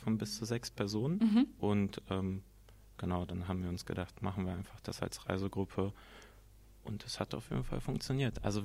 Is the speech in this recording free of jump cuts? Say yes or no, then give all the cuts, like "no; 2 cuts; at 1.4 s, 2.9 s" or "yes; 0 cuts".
yes; 0 cuts